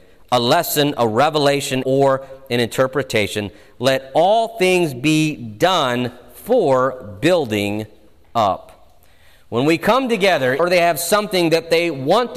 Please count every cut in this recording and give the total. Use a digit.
2